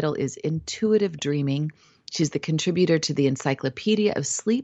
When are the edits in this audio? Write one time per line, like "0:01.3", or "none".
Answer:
none